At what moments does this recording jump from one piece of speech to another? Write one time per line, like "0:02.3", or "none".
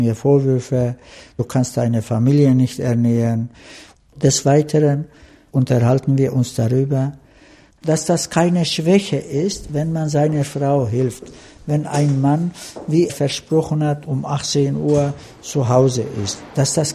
0:13.1